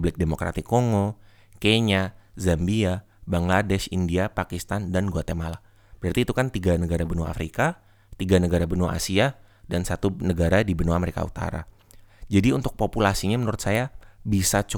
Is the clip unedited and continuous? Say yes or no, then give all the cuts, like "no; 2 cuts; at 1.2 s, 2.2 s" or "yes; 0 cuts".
yes; 0 cuts